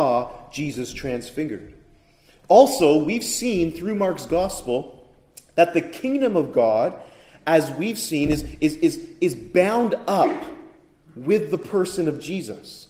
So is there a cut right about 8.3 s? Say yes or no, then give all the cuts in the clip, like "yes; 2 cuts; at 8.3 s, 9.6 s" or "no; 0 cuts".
no; 0 cuts